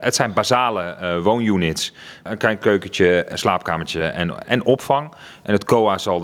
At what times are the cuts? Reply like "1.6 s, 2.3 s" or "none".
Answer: none